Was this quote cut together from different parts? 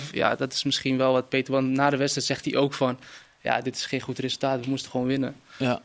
no; 0 cuts

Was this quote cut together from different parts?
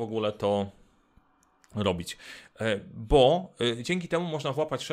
no; 0 cuts

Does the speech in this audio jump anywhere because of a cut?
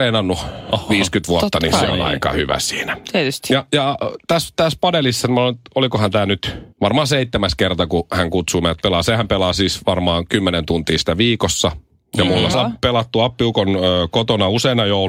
yes; 2 cuts; at 6.7 s, 12.5 s

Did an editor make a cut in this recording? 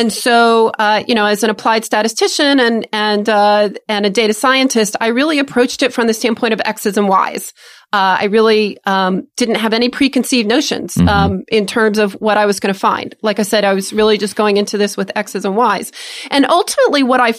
no; 0 cuts

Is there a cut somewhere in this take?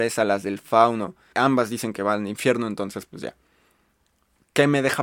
yes; 1 cut; at 1.3 s

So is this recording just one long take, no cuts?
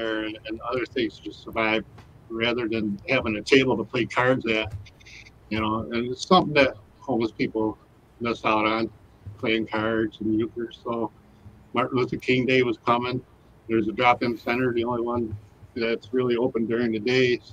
yes; 0 cuts

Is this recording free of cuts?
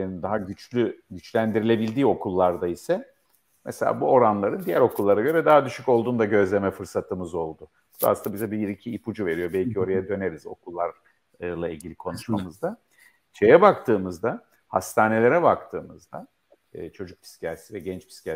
yes; 0 cuts

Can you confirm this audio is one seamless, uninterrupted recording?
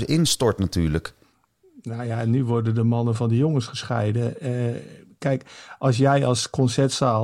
yes; 0 cuts

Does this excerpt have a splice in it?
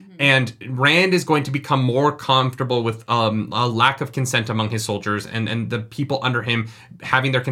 no; 0 cuts

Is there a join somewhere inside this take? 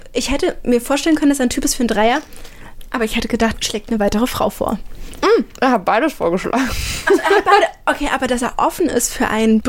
yes; 1 cut; at 3.5 s

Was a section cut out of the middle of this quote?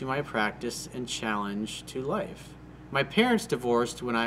no; 0 cuts

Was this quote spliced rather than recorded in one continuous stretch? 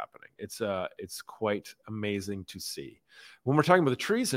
no; 0 cuts

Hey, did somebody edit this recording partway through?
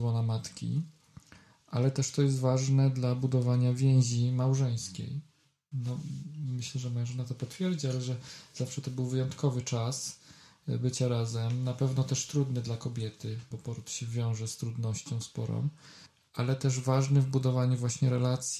yes; 1 cut; at 13.5 s

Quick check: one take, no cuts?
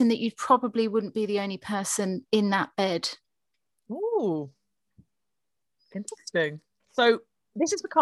no; 1 cut; at 6.8 s

